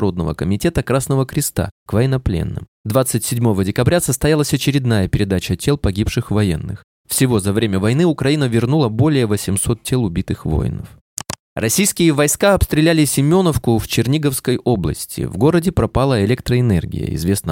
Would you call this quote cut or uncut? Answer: uncut